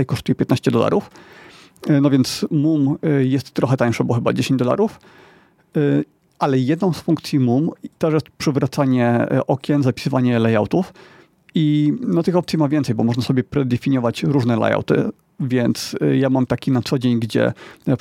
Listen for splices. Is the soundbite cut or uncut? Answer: uncut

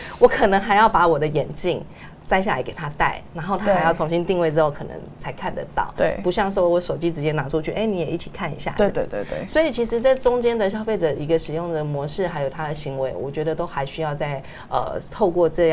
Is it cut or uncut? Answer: cut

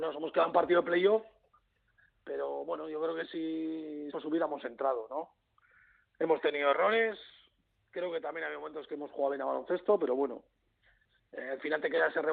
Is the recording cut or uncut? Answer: cut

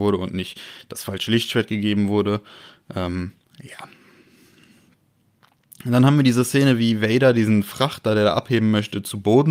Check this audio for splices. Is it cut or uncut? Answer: uncut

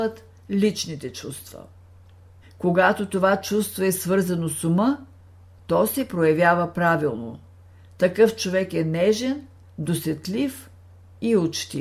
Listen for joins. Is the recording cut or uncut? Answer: cut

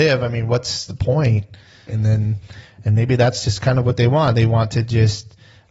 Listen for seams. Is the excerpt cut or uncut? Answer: cut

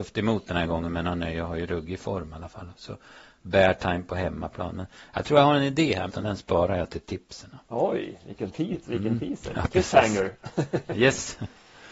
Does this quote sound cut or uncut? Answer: cut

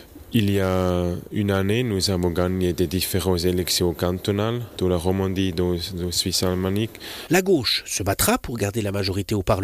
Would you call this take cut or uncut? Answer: cut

